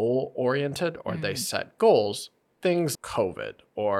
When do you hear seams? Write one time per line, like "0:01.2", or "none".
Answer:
0:02.9